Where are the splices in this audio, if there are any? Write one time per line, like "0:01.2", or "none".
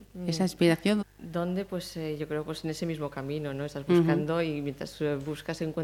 0:01.0

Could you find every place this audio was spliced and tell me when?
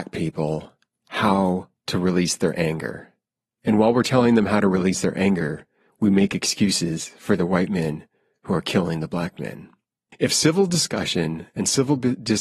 none

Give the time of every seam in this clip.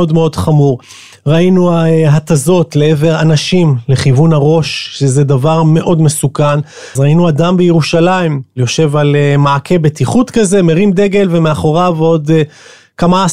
0:07.0

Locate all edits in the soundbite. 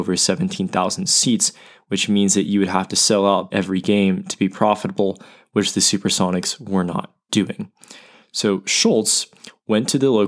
0:03.5

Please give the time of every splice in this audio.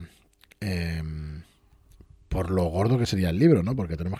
none

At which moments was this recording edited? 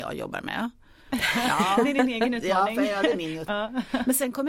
0:03.5

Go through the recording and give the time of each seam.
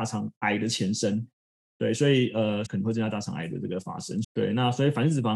0:01.6
0:02.7
0:04.2

